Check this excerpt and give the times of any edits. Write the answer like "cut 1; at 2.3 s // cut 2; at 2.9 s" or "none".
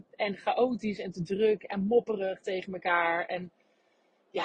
none